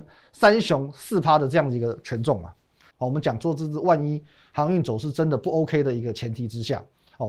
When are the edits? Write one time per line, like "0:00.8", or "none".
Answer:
0:02.9